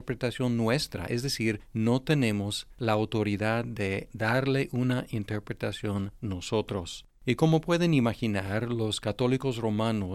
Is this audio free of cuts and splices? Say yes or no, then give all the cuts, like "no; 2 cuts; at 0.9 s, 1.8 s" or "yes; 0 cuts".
yes; 0 cuts